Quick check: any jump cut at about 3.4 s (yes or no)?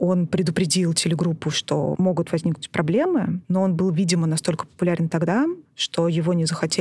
yes